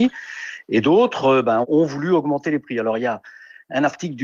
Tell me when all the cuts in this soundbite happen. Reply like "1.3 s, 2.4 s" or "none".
none